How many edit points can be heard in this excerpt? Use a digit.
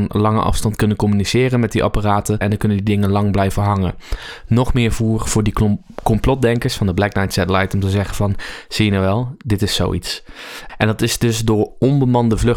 2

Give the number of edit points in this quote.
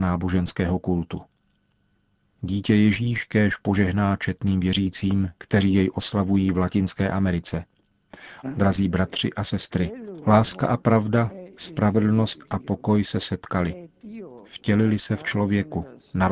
1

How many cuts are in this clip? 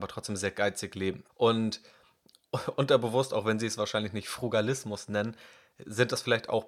1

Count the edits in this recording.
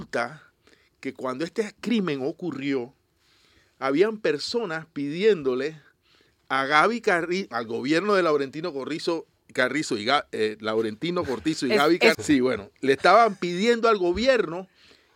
2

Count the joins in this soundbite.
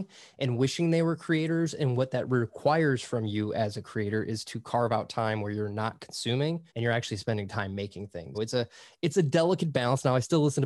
2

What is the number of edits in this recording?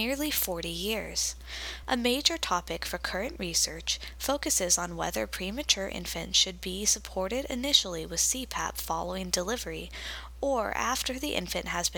1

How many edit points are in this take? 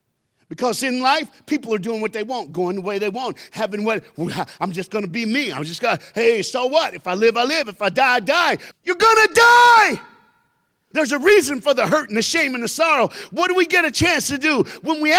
2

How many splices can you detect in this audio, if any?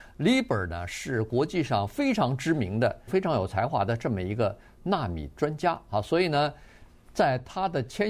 1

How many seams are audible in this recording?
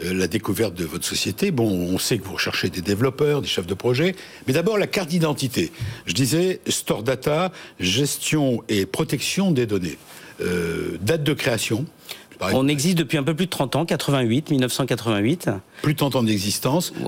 0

